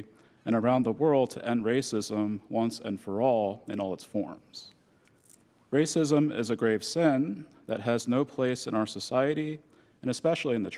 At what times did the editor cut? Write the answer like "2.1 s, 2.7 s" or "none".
none